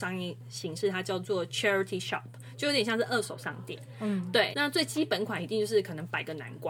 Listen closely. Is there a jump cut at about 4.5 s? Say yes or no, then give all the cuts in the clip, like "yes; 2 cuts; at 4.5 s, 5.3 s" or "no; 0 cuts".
yes; 1 cut; at 4.5 s